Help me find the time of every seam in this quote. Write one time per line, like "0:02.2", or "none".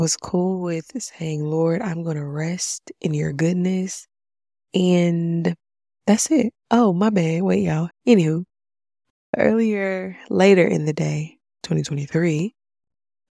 0:06.6
0:07.9
0:11.6